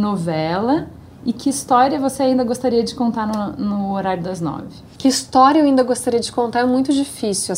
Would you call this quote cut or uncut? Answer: cut